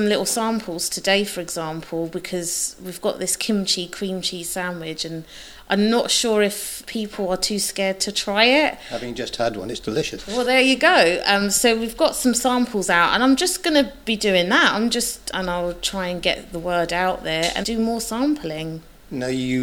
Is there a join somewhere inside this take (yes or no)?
yes